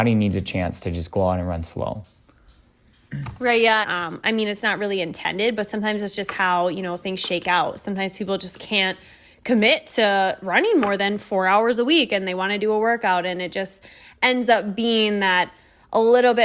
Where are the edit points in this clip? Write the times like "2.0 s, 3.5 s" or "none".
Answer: 3.8 s